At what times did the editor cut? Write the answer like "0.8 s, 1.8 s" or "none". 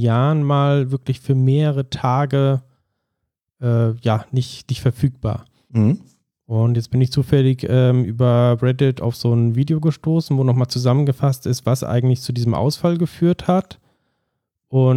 none